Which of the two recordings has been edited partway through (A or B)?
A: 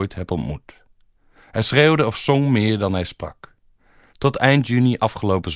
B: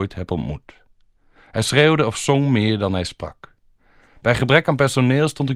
A